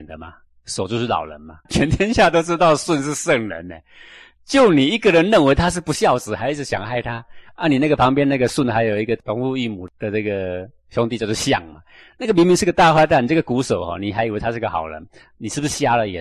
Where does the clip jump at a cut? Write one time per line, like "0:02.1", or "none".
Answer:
0:01.7